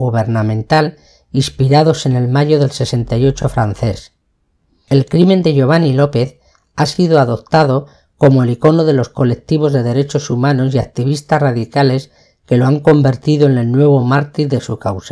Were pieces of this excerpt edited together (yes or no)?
no